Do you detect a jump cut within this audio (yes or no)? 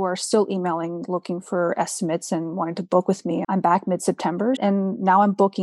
yes